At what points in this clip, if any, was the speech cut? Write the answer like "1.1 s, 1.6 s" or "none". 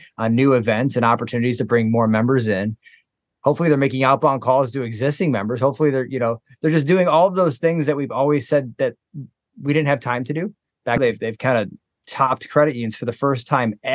11.0 s